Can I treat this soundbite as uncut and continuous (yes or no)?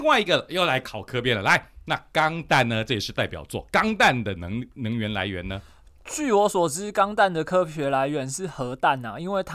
yes